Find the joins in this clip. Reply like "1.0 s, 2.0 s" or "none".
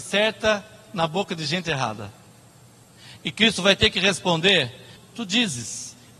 5.0 s